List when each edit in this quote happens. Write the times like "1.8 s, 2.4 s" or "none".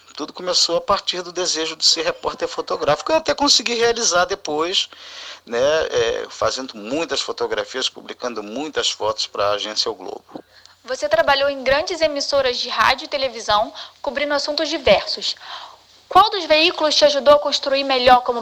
none